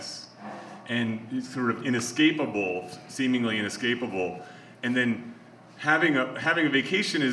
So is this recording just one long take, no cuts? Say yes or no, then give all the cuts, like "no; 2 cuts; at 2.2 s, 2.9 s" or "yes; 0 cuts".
yes; 0 cuts